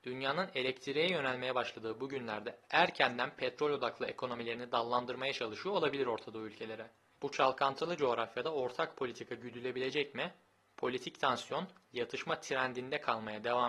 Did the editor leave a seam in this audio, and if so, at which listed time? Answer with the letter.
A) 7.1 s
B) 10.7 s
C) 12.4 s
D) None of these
D